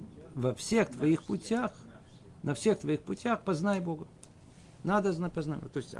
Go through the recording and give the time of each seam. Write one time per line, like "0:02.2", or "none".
none